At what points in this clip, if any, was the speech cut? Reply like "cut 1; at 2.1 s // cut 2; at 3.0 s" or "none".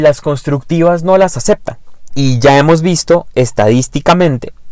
cut 1; at 2.1 s